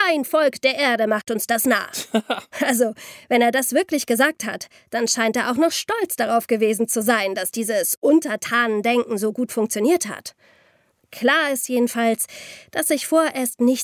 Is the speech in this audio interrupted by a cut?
no; 0 cuts

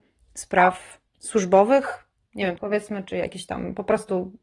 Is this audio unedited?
no; 2 cuts; at 1.1 s, 2.6 s

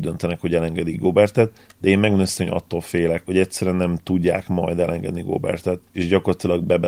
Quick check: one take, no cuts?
no; 2 cuts; at 3.2 s, 5.9 s

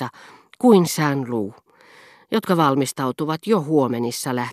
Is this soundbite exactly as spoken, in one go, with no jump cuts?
yes; 0 cuts

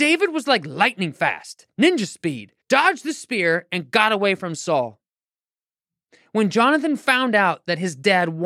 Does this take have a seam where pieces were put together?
yes; 1 cut; at 2.6 s

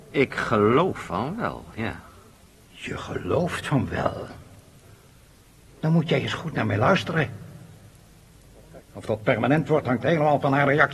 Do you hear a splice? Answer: yes; 1 cut; at 8.8 s

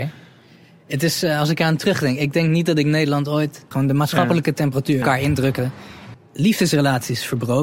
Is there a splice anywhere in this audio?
yes; 3 cuts; at 3.7 s, 5.0 s, 6.1 s

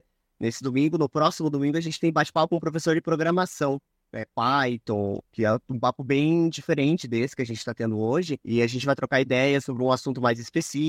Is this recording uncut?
no; 1 cut; at 5.3 s

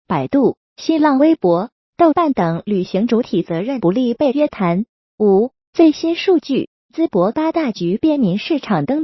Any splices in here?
yes; 1 cut; at 4.9 s

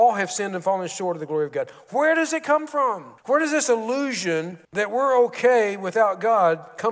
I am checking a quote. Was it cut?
yes; 2 cuts; at 3.2 s, 4.6 s

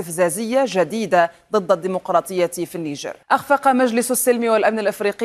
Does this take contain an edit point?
yes; 1 cut; at 3.2 s

